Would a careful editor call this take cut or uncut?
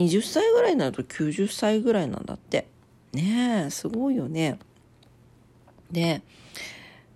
uncut